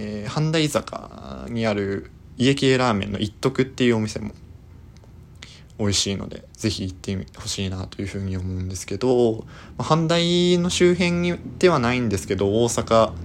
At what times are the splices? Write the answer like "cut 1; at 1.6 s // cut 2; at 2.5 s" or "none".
cut 1; at 6.5 s